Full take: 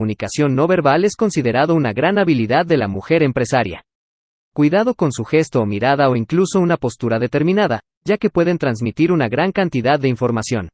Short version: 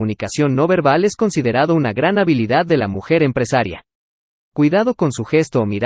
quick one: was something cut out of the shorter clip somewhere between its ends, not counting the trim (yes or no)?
no